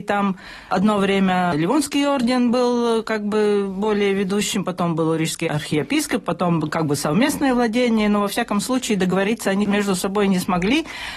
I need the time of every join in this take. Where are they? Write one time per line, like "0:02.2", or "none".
none